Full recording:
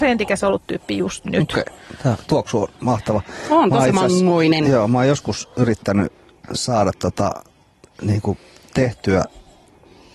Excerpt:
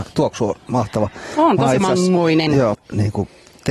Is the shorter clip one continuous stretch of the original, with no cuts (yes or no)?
no